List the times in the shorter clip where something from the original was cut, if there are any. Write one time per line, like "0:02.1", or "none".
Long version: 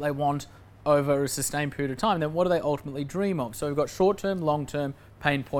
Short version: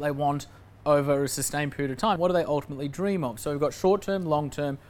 0:02.2